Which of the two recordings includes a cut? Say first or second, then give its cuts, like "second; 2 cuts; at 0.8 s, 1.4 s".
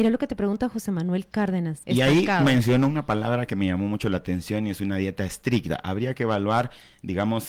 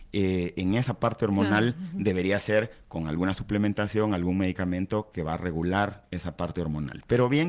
first; 1 cut; at 1.8 s